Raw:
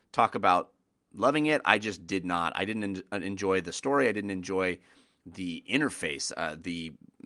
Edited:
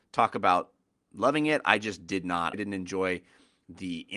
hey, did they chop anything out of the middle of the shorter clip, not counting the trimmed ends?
yes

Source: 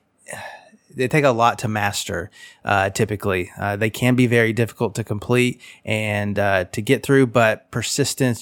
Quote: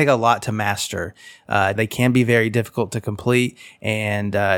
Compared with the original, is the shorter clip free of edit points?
no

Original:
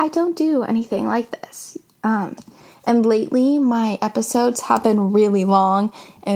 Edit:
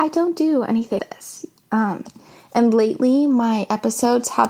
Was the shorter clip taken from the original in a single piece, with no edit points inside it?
no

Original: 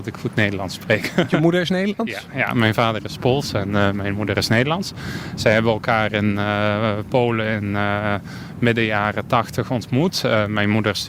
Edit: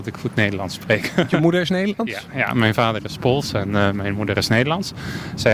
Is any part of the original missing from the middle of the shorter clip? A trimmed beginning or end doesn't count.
no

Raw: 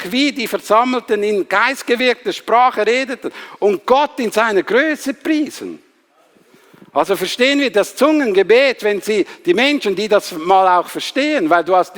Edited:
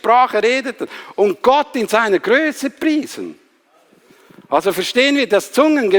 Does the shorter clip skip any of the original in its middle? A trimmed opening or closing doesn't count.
no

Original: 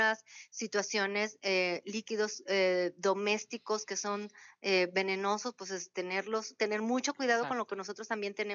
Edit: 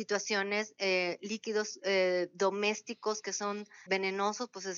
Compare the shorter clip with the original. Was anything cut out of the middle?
yes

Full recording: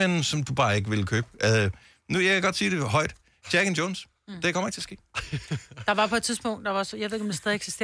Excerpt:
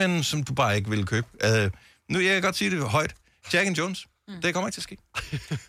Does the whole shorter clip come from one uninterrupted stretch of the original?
yes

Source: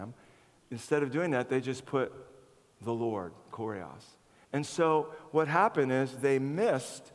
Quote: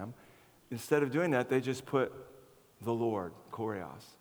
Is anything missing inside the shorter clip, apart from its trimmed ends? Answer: no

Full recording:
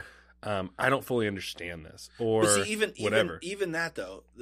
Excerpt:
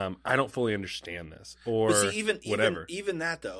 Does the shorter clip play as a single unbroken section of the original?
yes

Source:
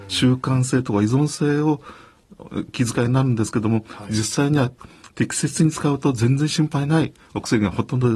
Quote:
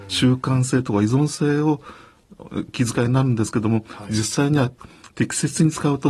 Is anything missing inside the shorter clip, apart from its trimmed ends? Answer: no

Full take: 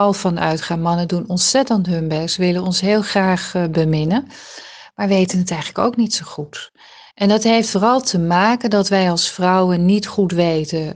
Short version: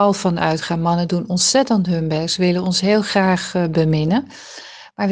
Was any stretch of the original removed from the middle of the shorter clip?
no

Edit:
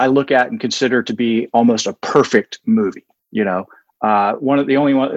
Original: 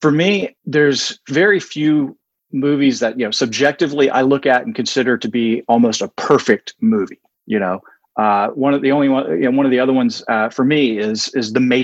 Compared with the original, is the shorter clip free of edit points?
yes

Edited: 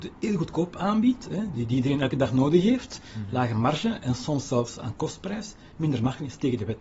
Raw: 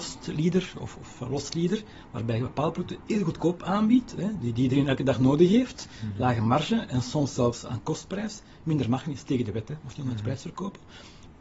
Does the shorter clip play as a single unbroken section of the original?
yes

